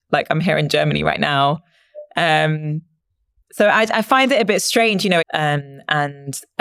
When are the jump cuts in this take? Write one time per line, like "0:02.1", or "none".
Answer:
0:05.2